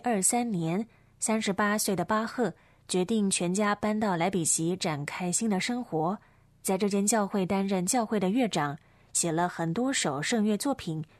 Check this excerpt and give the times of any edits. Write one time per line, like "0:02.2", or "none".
none